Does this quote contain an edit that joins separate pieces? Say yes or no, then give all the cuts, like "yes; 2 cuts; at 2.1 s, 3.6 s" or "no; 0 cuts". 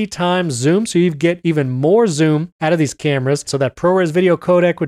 yes; 1 cut; at 3.5 s